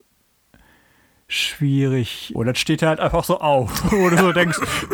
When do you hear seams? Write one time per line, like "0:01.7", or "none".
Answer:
0:02.3